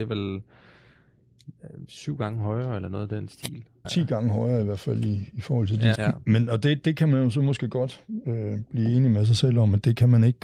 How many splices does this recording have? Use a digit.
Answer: 2